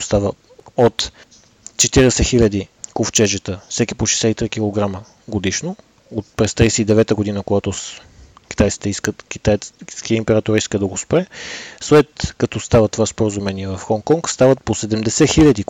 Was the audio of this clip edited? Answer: no; 0 cuts

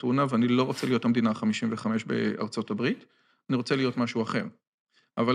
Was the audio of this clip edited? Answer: no; 0 cuts

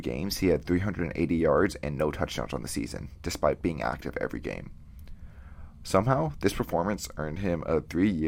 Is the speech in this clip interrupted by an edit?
no; 0 cuts

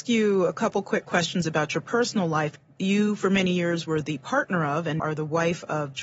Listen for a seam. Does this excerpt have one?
yes; 1 cut; at 5.0 s

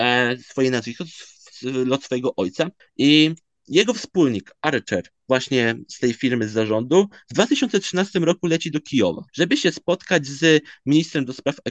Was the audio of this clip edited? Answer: yes; 2 cuts; at 2.8 s, 9.3 s

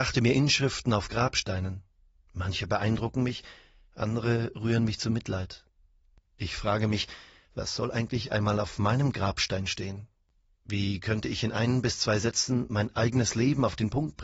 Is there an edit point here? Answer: no; 0 cuts

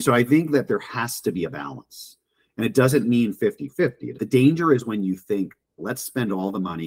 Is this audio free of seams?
yes; 0 cuts

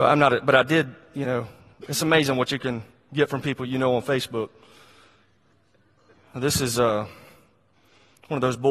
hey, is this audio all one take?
yes; 0 cuts

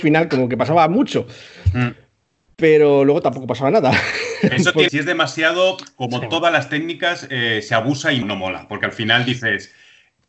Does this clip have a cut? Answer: yes; 2 cuts; at 4.9 s, 8.2 s

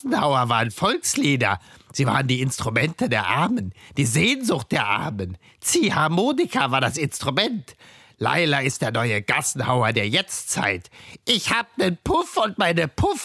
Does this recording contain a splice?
no; 0 cuts

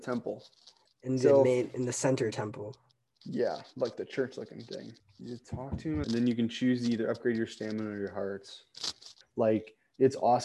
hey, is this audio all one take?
no; 3 cuts; at 5.0 s, 6.0 s, 9.2 s

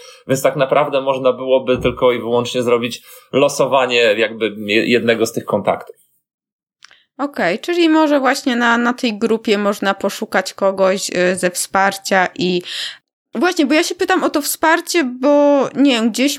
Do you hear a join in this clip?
no; 0 cuts

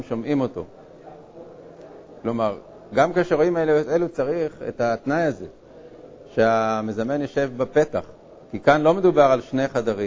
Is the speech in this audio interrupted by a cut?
yes; 2 cuts; at 2.2 s, 8.4 s

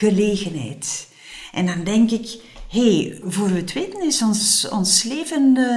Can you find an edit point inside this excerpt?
yes; 1 cut; at 3.2 s

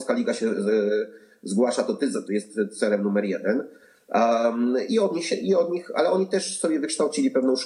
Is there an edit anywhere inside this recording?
yes; 1 cut; at 2.2 s

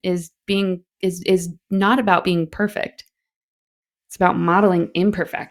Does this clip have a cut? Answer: yes; 1 cut; at 0.9 s

